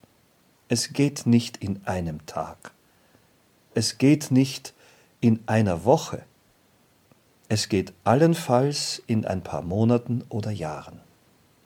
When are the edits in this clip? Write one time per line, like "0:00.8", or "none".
none